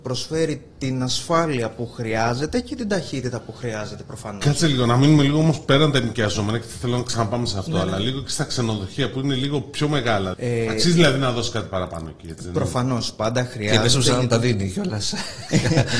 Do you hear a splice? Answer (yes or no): yes